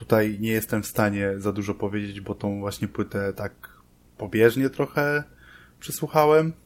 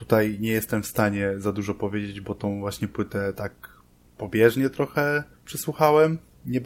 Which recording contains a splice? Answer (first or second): second